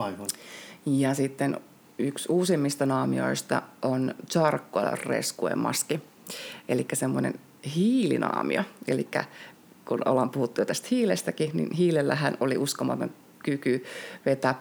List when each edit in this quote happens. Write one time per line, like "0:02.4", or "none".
none